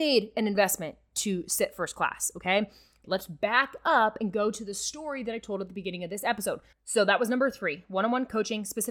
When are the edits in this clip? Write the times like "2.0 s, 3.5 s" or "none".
3.0 s, 6.7 s